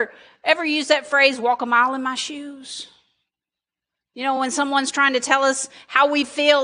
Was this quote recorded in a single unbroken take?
yes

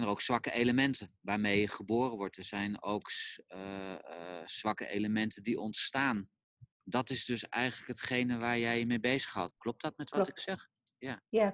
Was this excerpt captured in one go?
no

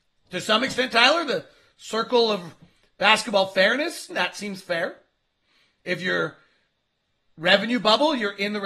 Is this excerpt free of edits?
no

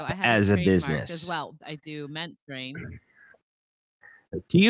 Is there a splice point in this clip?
yes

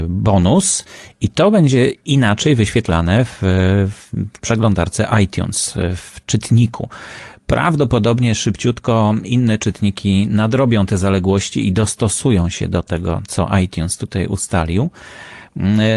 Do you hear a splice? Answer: no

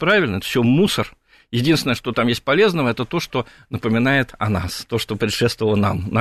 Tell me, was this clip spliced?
no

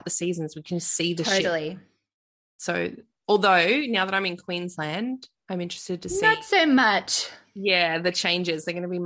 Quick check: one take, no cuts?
yes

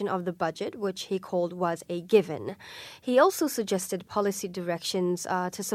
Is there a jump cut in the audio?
no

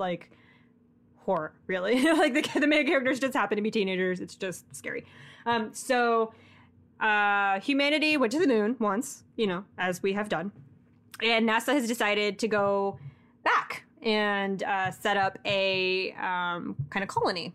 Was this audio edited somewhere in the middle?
no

